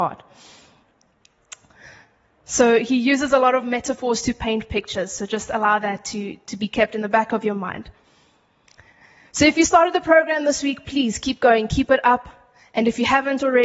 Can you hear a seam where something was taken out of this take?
no; 0 cuts

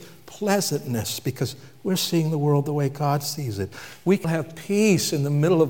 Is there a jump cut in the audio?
yes; 1 cut; at 4.2 s

